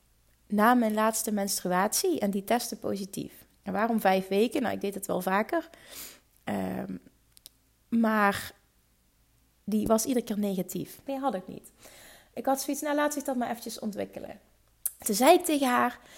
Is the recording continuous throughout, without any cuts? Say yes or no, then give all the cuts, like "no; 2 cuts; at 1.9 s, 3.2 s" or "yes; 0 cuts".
no; 2 cuts; at 11.1 s, 15.0 s